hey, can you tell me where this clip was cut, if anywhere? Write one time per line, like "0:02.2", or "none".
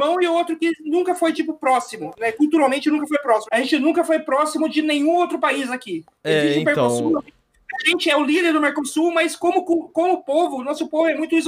0:03.5